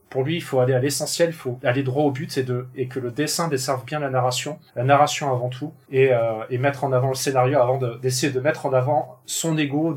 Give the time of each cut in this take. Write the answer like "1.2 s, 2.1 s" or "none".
4.7 s, 5.8 s